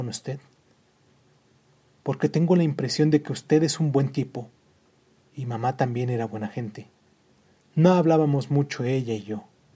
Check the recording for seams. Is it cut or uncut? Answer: uncut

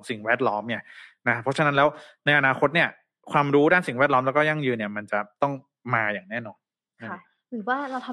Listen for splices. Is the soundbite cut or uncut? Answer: uncut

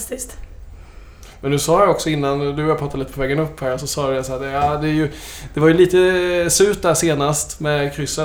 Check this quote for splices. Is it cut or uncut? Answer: uncut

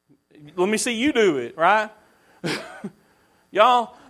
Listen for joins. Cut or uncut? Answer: uncut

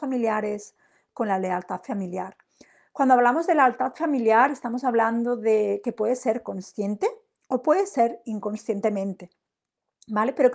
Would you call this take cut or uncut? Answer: uncut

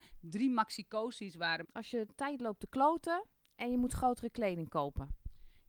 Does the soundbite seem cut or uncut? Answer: cut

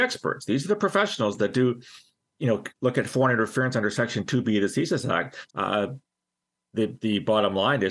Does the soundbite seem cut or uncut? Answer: cut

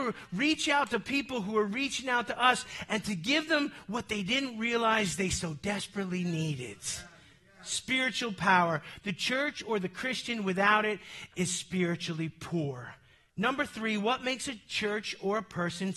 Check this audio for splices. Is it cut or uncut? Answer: uncut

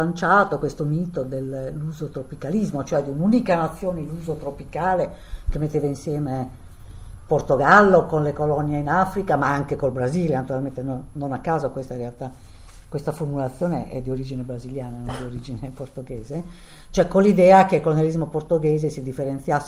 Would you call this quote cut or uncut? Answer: uncut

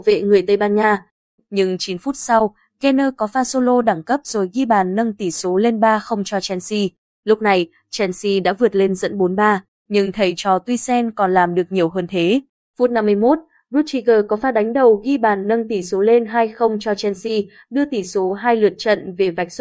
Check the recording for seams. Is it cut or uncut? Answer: cut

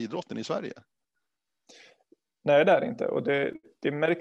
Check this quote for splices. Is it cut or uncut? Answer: uncut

